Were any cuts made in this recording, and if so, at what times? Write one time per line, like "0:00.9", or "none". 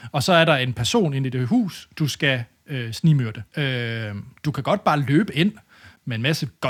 0:03.5